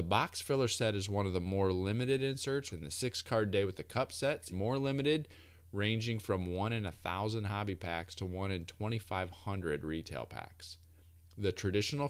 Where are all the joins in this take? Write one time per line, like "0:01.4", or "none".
0:02.7
0:04.5